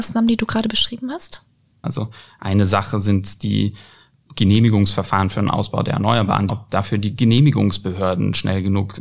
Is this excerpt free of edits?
no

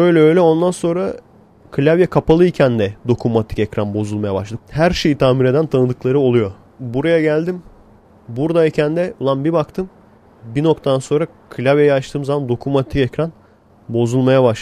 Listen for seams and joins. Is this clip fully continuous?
no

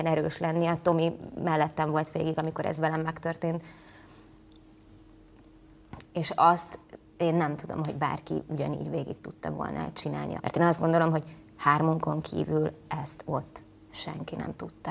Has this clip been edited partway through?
yes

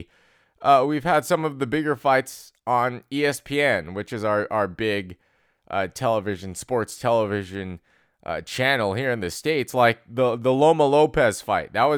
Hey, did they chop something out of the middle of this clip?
no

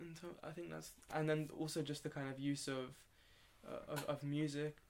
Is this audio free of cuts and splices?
yes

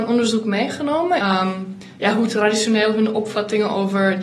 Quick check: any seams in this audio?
yes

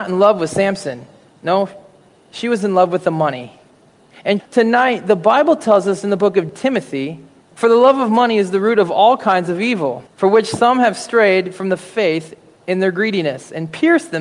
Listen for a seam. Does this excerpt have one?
yes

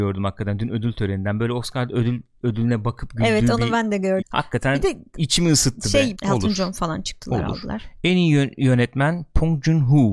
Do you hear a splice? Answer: yes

